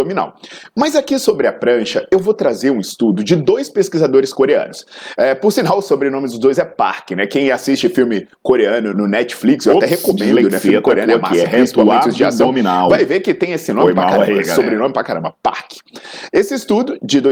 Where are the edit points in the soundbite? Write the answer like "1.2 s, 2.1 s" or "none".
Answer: 8.9 s